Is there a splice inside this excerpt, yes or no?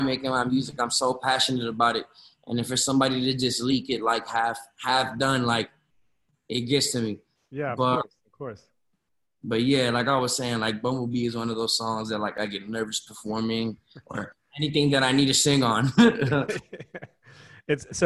no